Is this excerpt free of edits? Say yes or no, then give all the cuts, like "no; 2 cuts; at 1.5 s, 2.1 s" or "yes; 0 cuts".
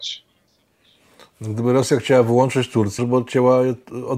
no; 1 cut; at 3.0 s